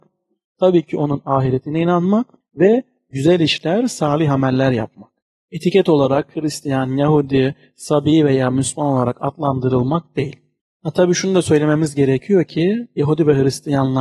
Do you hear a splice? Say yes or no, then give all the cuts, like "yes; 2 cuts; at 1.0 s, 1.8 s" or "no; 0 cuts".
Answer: no; 0 cuts